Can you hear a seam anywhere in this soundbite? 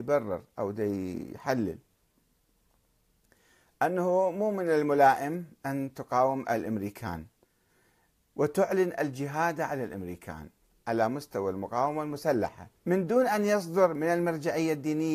yes; 2 cuts; at 8.3 s, 12.8 s

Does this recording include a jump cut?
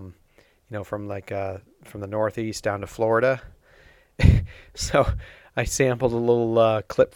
no; 0 cuts

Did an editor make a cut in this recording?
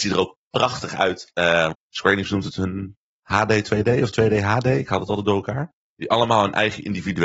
yes; 2 cuts; at 1.7 s, 5.8 s

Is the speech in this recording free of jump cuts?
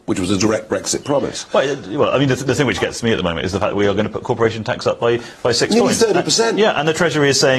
yes; 0 cuts

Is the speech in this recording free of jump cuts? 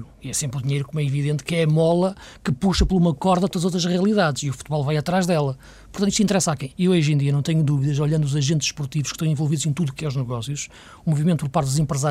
no; 1 cut; at 6.7 s

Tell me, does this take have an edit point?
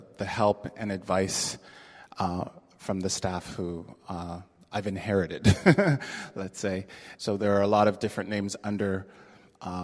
yes; 1 cut; at 7.2 s

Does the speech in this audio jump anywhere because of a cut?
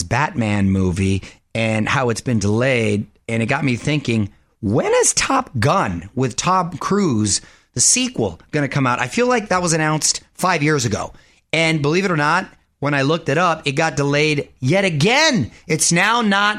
no; 0 cuts

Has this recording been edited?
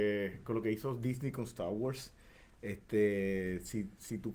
no; 0 cuts

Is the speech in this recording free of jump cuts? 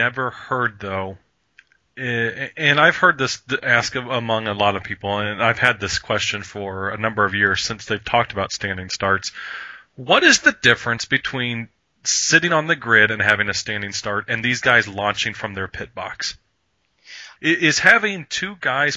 no; 1 cut; at 17.4 s

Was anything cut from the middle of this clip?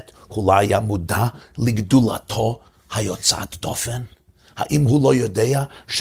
no; 0 cuts

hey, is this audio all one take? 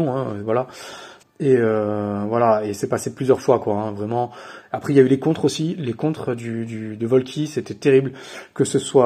no; 1 cut; at 1.2 s

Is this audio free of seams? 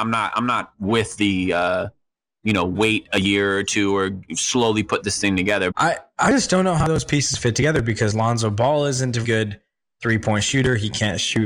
no; 2 cuts; at 5.7 s, 9.2 s

